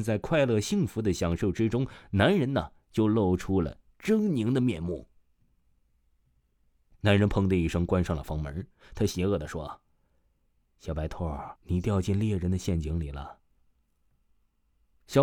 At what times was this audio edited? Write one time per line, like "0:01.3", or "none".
0:11.6
0:13.6